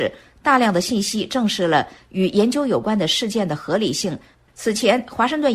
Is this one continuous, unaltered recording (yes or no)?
yes